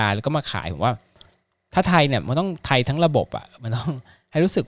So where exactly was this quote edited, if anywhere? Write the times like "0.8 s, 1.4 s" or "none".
none